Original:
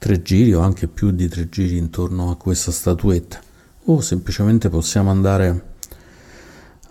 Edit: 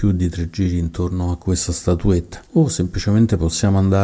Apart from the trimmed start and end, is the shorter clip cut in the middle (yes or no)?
yes